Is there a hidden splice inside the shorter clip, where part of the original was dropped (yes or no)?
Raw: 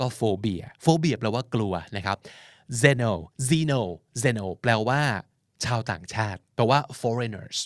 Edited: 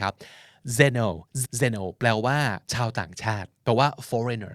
yes